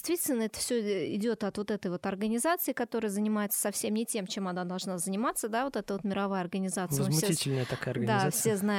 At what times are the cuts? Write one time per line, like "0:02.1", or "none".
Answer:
none